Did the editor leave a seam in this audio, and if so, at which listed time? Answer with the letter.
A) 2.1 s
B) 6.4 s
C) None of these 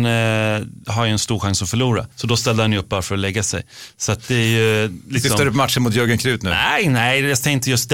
A